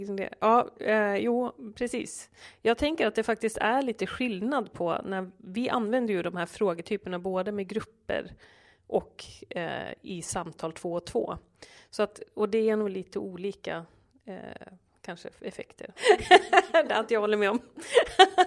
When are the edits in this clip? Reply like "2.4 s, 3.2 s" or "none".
16.0 s